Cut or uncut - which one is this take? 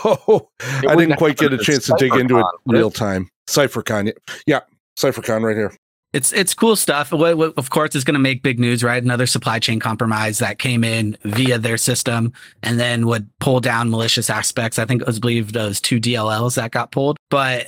uncut